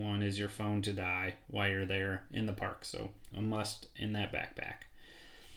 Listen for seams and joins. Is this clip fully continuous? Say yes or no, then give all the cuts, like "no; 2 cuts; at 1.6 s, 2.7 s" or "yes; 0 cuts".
no; 1 cut; at 3.3 s